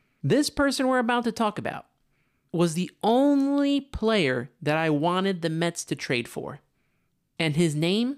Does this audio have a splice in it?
no; 0 cuts

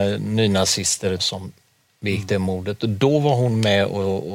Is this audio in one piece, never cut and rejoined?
no; 1 cut; at 1.2 s

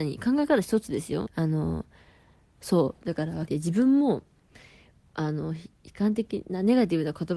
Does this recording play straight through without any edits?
no; 2 cuts; at 1.3 s, 3.5 s

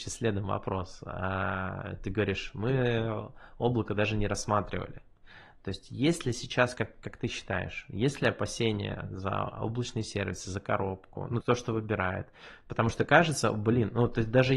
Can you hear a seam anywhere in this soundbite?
yes; 1 cut; at 11.4 s

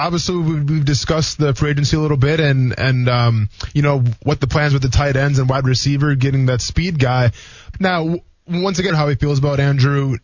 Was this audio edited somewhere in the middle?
yes; 2 cuts; at 7.7 s, 8.9 s

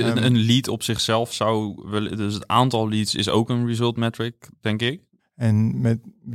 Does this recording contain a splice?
yes; 1 cut; at 5.2 s

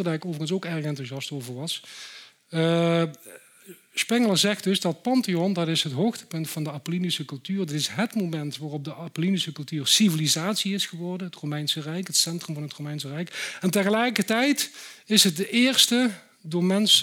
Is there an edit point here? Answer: no; 0 cuts

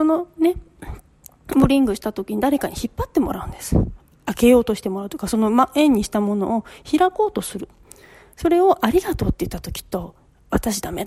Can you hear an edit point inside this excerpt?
no; 0 cuts

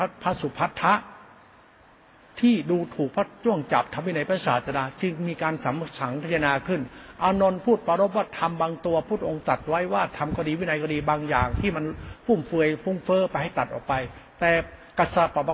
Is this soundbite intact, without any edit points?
yes; 0 cuts

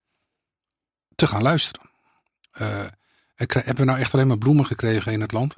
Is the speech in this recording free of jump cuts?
yes; 0 cuts

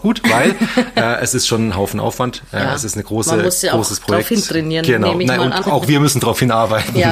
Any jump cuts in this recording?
yes; 1 cut; at 5.6 s

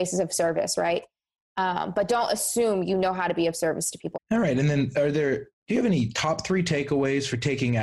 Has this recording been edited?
yes; 1 cut; at 4.1 s

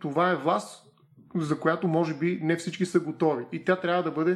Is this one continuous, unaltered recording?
yes; 0 cuts

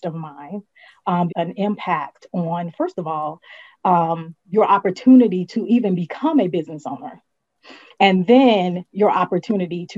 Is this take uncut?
no; 2 cuts; at 1.3 s, 4.4 s

